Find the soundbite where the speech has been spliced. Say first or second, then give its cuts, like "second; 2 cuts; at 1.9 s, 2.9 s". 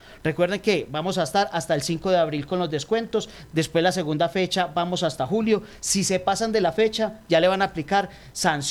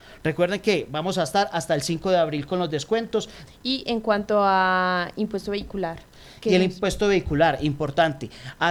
second; 1 cut; at 3.5 s